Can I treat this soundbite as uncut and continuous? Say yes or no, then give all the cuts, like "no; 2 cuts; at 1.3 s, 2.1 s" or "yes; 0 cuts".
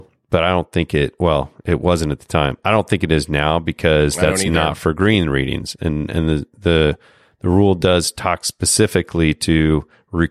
yes; 0 cuts